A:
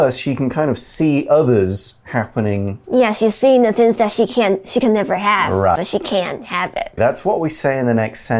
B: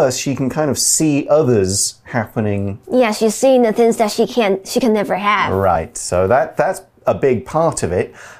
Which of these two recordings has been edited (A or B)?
A